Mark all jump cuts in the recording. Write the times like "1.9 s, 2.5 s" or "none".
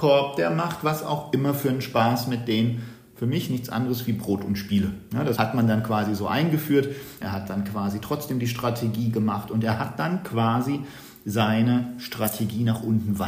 5.4 s, 7.2 s